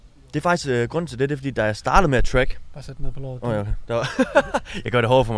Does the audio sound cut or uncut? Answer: uncut